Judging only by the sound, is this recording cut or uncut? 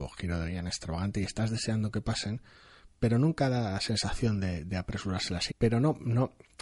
cut